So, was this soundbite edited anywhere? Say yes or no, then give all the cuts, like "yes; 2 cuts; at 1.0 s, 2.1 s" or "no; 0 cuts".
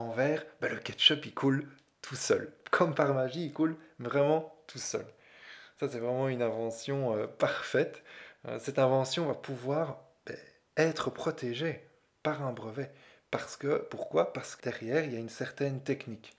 yes; 1 cut; at 14.6 s